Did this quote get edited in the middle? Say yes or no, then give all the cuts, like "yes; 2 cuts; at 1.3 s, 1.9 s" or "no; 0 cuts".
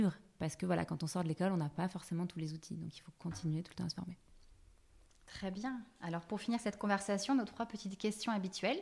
no; 0 cuts